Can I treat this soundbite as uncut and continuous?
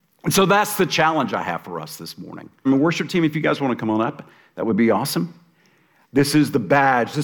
no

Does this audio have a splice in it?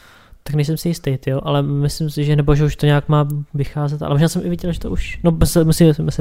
no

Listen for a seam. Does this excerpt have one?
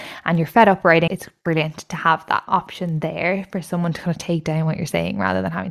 yes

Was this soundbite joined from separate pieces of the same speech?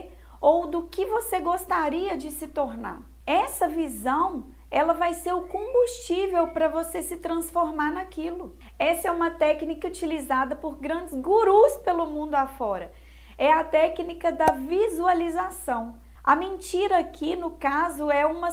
yes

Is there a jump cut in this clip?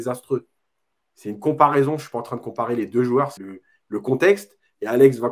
yes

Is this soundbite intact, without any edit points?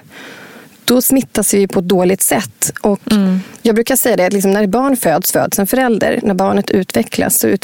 yes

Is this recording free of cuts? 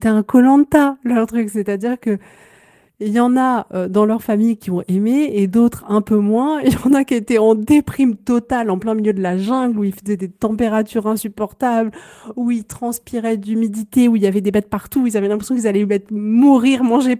yes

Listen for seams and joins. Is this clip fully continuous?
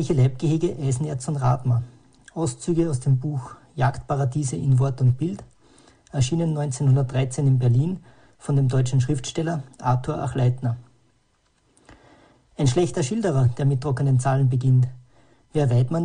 yes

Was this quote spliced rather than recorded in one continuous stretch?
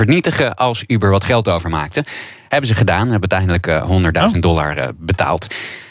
no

